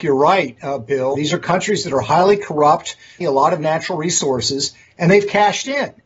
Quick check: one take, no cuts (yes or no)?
no